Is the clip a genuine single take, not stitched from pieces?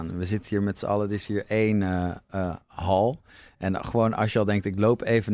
yes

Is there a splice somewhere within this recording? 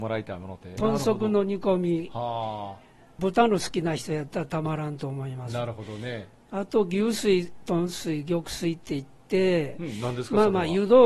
no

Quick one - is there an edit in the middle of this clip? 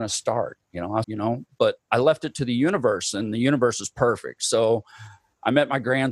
yes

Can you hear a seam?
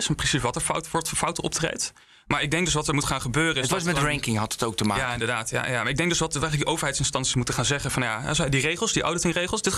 no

